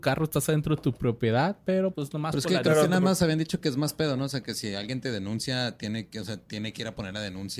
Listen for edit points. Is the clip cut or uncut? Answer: cut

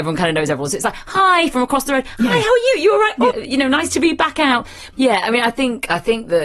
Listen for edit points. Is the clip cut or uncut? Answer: cut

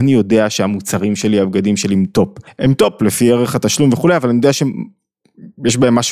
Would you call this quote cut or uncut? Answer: cut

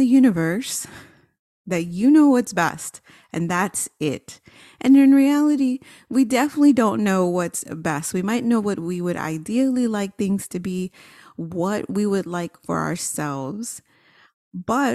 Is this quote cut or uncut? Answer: uncut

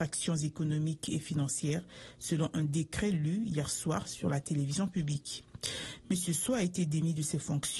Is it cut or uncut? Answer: uncut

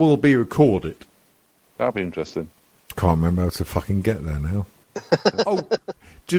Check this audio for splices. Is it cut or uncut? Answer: cut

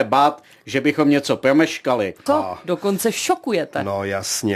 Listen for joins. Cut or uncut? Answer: cut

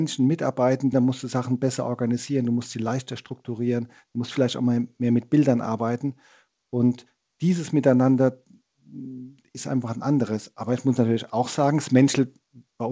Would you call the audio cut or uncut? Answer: cut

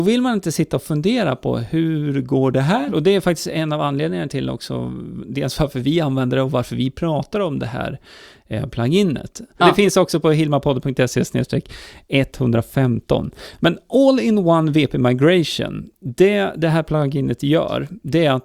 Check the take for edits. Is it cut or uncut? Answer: cut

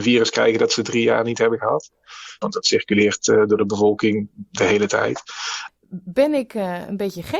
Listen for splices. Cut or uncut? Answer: cut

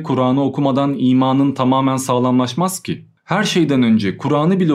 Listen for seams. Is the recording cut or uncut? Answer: uncut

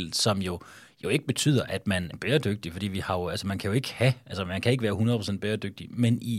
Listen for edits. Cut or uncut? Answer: cut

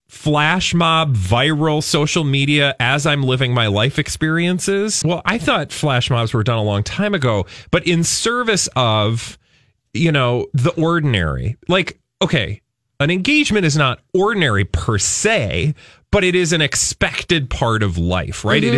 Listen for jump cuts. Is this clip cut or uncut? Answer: cut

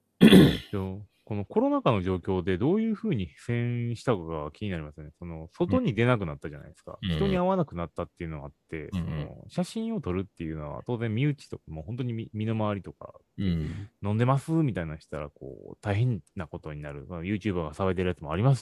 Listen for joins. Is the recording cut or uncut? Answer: uncut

